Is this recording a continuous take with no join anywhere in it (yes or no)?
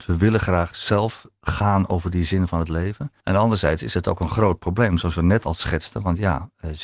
no